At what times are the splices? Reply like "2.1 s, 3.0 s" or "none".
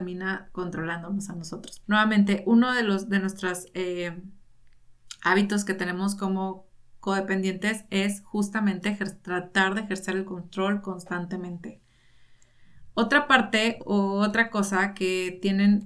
1.8 s, 13.8 s